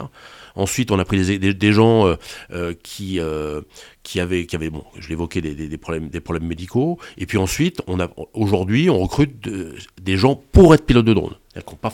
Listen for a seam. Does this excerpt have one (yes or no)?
no